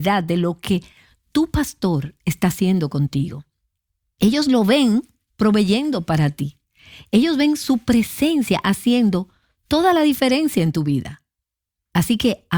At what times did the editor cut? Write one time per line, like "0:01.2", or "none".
none